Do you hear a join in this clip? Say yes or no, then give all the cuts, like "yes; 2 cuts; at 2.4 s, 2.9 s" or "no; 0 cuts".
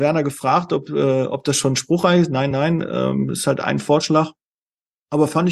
no; 0 cuts